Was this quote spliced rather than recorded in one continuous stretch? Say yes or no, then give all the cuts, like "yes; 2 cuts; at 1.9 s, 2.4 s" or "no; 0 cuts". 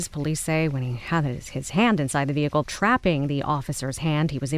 yes; 1 cut; at 2.6 s